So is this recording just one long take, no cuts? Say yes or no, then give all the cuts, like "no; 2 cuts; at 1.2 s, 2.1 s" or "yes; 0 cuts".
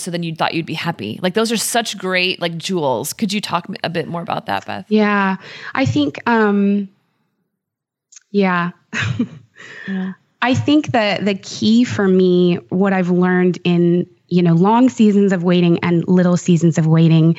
yes; 0 cuts